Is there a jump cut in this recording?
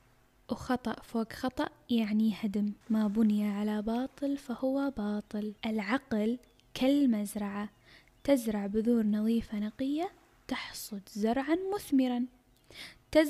yes; 2 cuts; at 2.8 s, 5.6 s

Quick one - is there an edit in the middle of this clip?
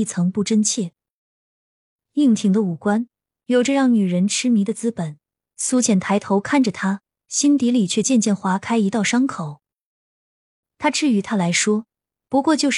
no; 0 cuts

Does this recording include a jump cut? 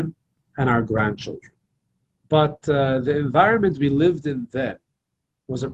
yes; 1 cut; at 2.2 s

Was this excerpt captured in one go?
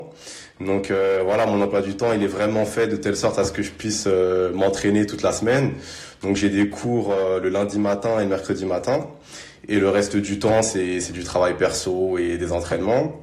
yes; 0 cuts

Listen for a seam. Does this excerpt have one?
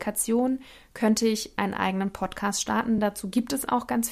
no; 0 cuts

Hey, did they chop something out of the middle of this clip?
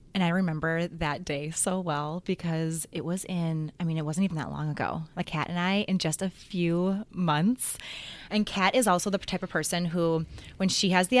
yes; 1 cut; at 5.2 s

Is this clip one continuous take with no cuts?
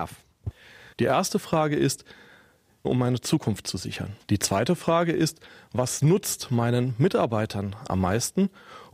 no; 3 cuts; at 0.9 s, 2.8 s, 4.2 s

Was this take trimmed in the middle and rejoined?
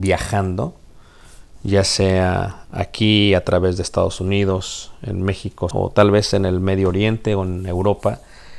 yes; 1 cut; at 5.7 s

